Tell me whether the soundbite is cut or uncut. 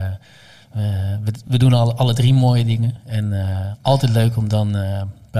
uncut